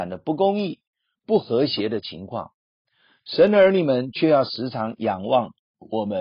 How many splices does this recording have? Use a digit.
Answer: 1